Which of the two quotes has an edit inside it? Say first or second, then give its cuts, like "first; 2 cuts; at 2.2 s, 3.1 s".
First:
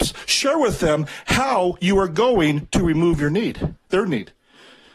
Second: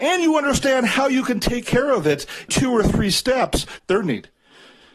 second; 2 cuts; at 2.5 s, 3.8 s